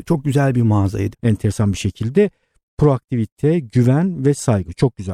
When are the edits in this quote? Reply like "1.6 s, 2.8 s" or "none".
1.1 s

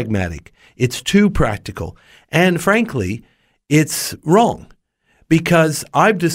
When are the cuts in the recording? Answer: none

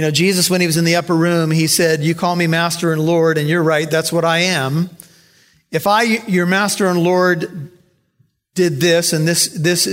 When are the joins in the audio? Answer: none

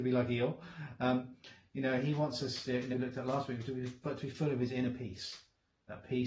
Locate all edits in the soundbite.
2.9 s

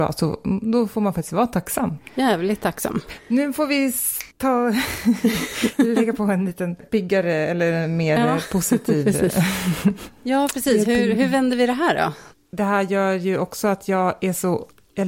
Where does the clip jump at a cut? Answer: 4.3 s

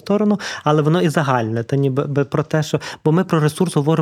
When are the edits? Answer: none

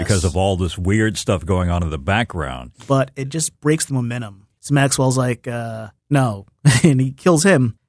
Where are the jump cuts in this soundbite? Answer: 2.7 s, 4.6 s, 6.0 s

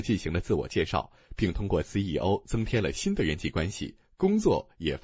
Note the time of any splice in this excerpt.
none

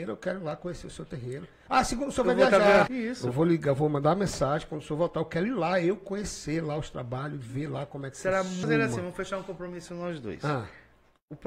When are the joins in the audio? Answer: 2.9 s, 8.6 s

